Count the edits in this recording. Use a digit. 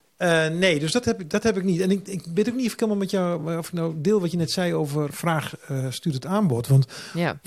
1